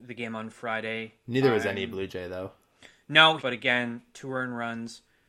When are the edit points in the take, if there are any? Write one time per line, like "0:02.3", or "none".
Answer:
0:03.4